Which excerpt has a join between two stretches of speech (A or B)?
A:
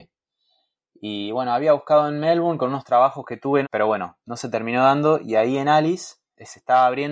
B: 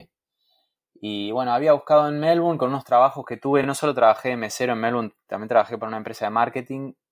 A